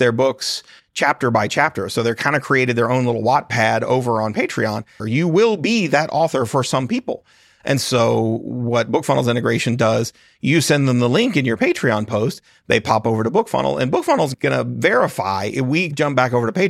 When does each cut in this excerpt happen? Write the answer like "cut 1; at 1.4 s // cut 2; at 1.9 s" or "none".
cut 1; at 5.0 s